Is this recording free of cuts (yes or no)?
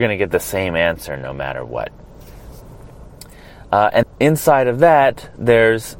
no